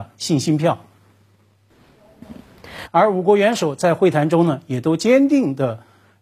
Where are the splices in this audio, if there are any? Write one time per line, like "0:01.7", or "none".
0:02.9